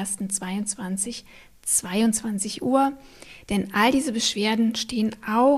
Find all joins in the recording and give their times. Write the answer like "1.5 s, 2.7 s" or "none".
3.4 s